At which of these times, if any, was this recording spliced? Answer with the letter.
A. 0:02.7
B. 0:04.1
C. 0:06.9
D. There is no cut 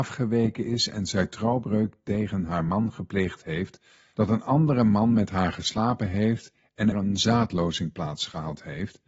C